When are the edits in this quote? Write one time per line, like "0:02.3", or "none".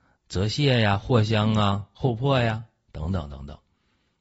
none